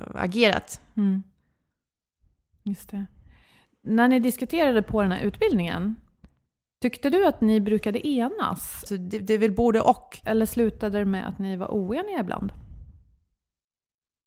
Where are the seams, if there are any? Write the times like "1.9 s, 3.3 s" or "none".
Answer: 8.9 s, 10.2 s